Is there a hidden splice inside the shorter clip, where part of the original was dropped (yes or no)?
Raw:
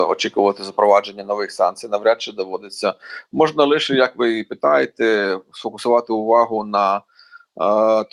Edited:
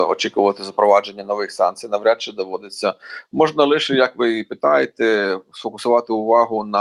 no